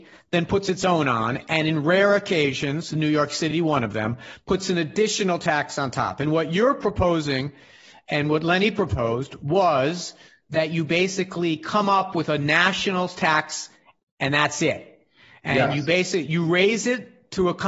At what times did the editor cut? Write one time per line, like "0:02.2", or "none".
none